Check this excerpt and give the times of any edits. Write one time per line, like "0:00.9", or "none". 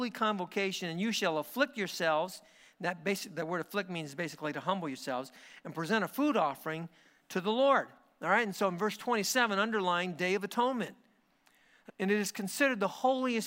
0:11.9